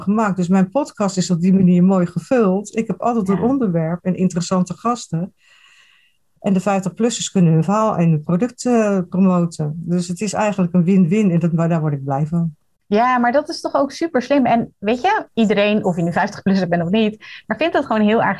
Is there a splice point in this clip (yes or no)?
no